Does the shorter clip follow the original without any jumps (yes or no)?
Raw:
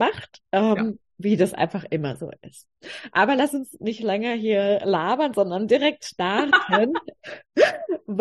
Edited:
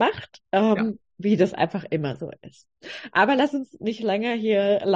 yes